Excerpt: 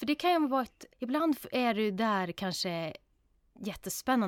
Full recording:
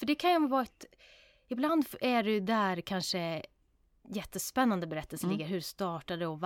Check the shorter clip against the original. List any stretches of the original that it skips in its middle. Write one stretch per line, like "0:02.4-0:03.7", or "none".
0:00.9-0:01.4